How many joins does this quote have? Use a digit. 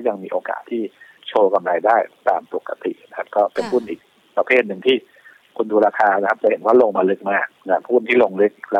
1